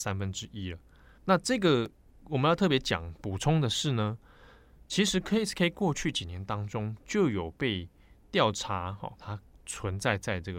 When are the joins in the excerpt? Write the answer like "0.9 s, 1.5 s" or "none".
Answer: 1.2 s, 9.2 s